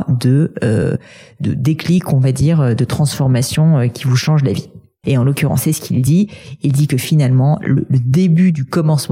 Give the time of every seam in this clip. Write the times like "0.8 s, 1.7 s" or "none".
5.0 s